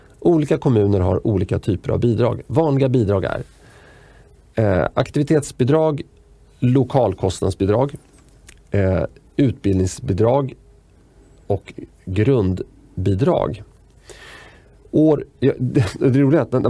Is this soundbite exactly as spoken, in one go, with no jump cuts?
yes; 0 cuts

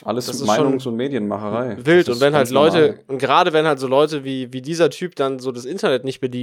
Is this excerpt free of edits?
yes; 0 cuts

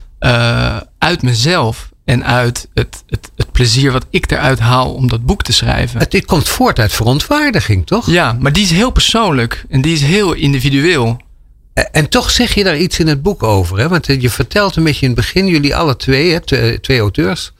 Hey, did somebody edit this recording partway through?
no; 0 cuts

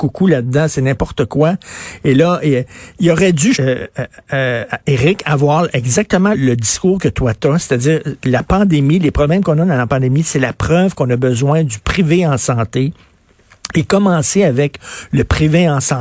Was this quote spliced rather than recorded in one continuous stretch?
yes; 2 cuts; at 3.5 s, 6.3 s

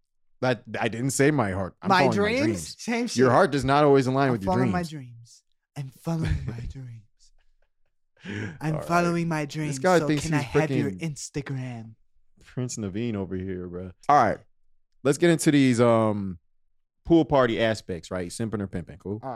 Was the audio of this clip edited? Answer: yes; 1 cut; at 14.0 s

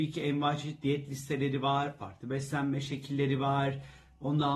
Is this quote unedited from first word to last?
yes; 0 cuts

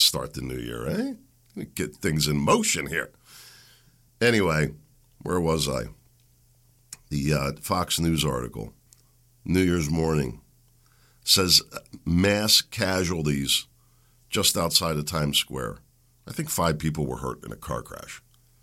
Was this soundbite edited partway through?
no; 0 cuts

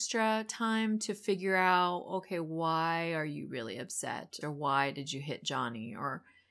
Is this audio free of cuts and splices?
no; 1 cut; at 4.4 s

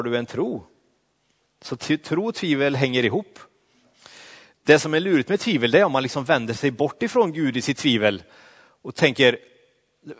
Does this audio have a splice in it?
no; 0 cuts

